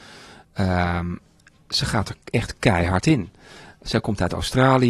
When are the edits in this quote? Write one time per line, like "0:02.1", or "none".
none